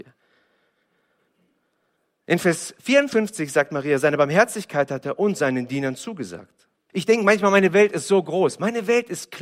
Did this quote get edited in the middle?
yes; 1 cut; at 6.9 s

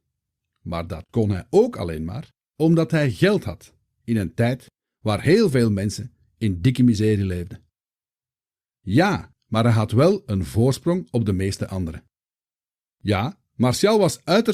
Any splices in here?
yes; 2 cuts; at 9.3 s, 12.8 s

